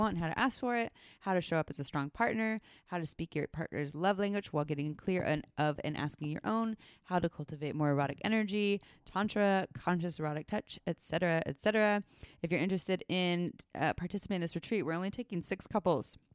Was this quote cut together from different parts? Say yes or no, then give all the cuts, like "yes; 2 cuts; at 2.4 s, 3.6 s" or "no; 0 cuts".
no; 0 cuts